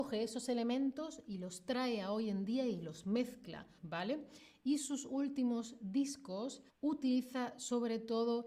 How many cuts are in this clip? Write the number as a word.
two